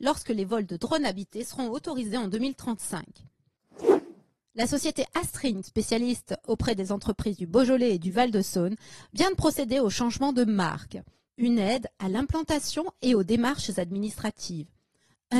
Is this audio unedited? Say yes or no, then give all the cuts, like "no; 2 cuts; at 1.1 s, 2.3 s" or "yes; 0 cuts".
no; 2 cuts; at 5.6 s, 11.3 s